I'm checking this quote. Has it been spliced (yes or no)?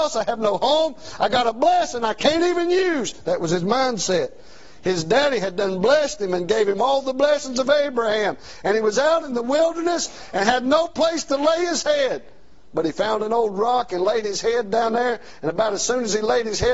no